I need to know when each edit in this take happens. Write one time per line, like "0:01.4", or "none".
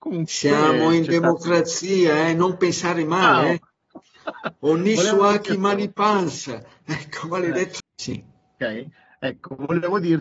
0:07.8

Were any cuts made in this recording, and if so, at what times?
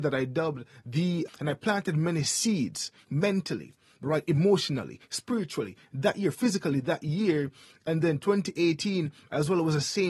0:01.3

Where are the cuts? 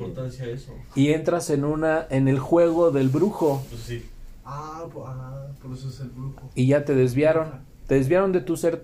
none

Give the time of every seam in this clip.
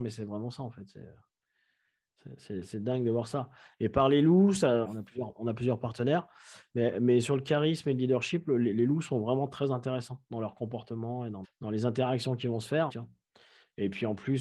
0:04.8
0:11.4
0:12.9

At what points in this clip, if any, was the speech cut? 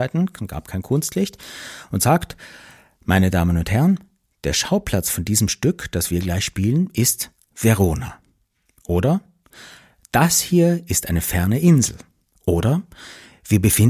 none

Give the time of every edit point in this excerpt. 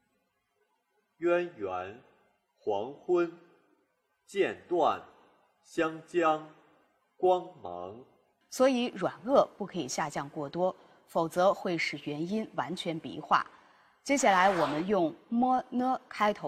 0:08.4

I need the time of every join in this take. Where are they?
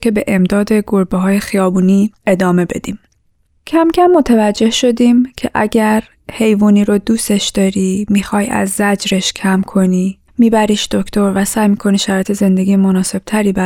0:10.3

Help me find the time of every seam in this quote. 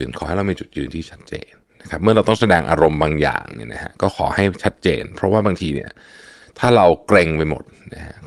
none

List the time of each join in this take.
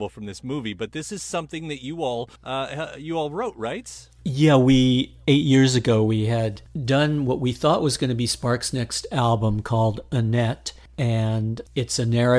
0:02.4

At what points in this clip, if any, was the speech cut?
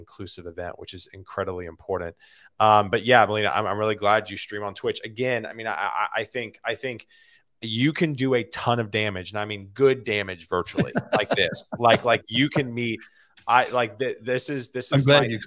none

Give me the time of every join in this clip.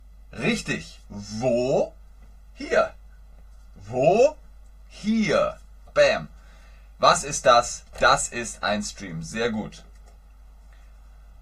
0:05.9

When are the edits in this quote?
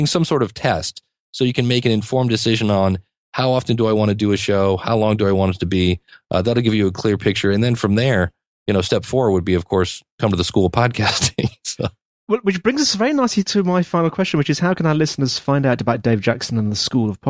none

